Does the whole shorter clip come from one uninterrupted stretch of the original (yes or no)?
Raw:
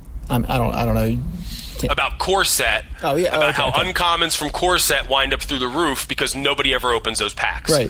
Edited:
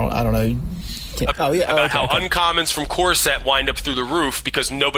no